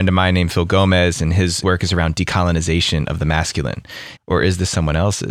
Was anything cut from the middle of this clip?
yes; 1 cut; at 4.2 s

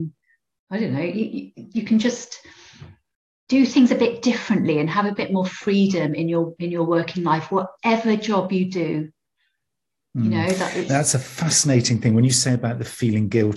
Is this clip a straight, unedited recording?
yes; 0 cuts

